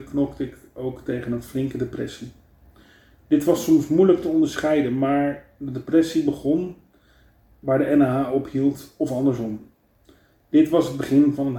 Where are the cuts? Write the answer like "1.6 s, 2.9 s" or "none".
none